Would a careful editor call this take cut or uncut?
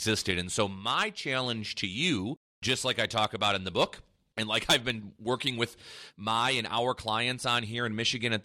uncut